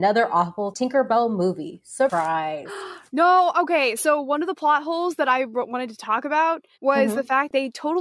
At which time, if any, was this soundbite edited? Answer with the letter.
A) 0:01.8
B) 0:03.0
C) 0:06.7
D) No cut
C